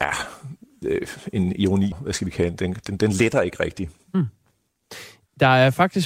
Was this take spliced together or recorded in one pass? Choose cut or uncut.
cut